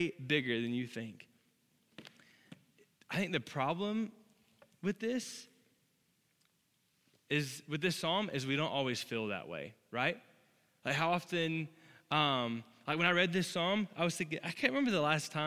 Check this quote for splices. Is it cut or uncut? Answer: uncut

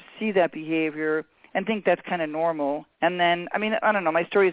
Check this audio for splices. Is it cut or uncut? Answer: uncut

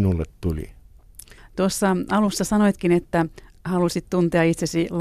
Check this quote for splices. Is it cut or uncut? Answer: cut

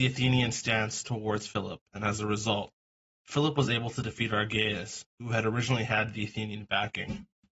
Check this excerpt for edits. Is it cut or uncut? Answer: uncut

